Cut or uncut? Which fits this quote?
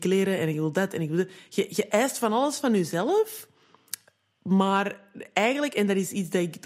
uncut